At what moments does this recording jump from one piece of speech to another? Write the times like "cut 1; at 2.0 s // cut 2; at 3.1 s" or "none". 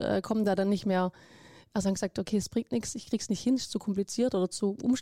none